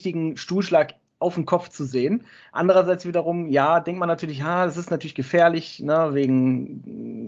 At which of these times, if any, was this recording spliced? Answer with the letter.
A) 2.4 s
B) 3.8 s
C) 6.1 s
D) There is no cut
D